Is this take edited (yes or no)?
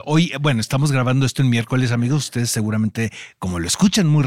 no